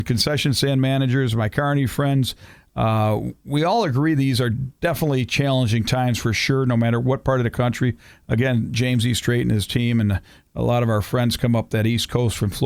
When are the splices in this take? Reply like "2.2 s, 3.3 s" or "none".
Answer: none